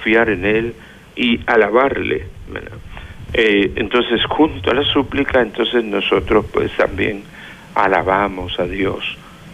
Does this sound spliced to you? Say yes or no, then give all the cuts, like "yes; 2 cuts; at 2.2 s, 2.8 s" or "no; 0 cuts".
yes; 1 cut; at 3.3 s